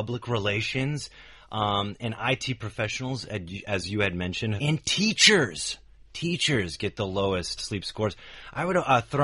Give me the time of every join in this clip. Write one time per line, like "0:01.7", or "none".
0:04.6
0:07.6